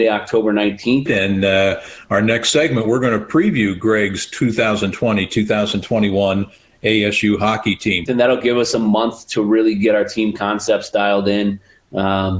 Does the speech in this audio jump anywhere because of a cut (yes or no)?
yes